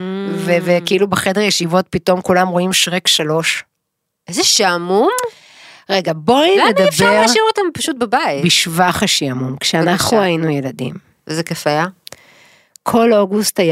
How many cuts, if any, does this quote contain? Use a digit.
0